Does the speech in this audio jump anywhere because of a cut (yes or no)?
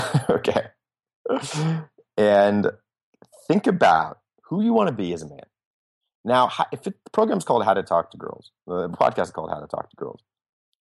no